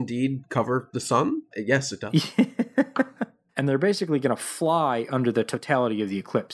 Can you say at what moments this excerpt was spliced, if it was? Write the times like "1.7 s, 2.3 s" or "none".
1.5 s, 3.5 s

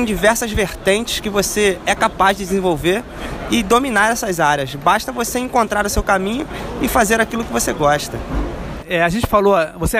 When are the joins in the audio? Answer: 8.8 s

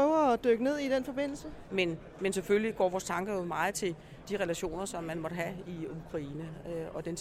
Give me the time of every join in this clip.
1.7 s, 4.2 s

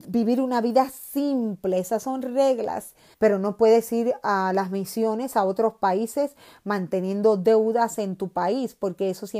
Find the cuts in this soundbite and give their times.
3.1 s

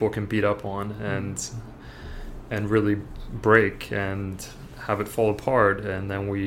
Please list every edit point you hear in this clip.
none

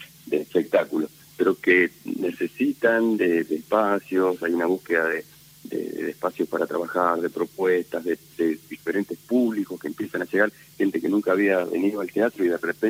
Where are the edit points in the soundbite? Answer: 1.2 s

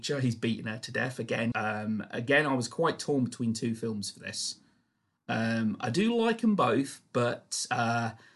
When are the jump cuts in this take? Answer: 1.5 s

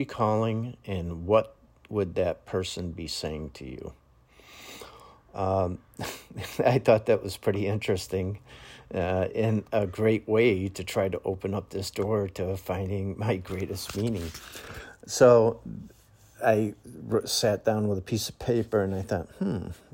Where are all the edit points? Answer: none

